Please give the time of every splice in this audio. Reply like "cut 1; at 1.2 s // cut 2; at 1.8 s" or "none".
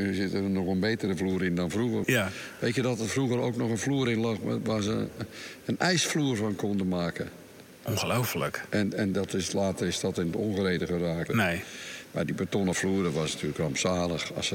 cut 1; at 2.0 s // cut 2; at 11.3 s